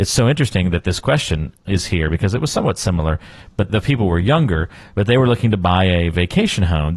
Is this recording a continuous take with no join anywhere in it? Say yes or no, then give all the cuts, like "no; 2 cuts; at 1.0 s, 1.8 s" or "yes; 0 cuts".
yes; 0 cuts